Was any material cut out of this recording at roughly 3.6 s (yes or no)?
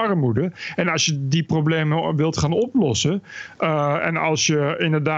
no